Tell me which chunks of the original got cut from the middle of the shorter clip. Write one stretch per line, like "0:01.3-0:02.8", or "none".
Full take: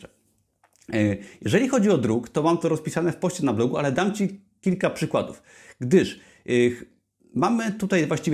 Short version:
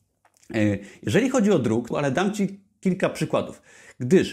0:02.3-0:03.7